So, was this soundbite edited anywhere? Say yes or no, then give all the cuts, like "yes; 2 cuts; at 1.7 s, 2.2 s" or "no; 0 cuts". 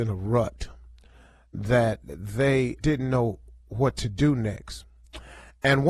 yes; 1 cut; at 2.8 s